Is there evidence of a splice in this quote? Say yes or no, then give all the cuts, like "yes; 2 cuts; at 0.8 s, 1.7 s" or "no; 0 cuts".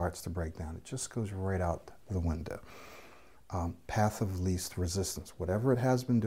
yes; 1 cut; at 3.4 s